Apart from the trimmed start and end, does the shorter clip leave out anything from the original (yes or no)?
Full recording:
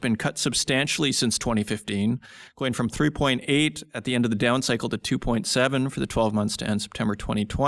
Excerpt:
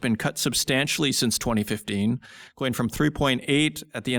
no